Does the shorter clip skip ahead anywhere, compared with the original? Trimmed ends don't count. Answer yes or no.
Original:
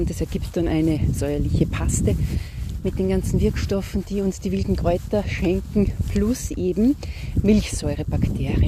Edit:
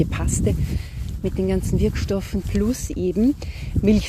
yes